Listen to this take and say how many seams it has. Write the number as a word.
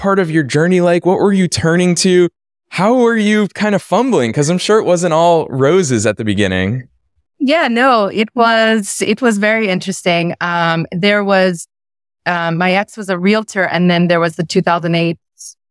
zero